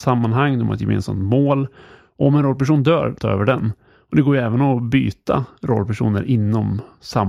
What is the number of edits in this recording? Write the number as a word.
one